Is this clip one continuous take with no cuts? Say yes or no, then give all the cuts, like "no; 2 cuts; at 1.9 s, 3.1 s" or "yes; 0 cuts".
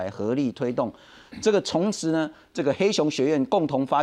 yes; 0 cuts